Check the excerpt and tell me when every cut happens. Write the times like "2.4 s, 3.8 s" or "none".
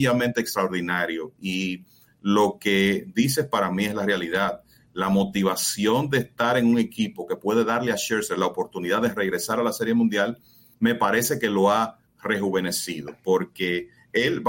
none